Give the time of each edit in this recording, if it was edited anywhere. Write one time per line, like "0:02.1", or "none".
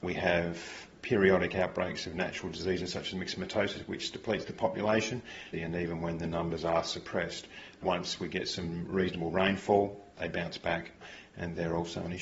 0:05.5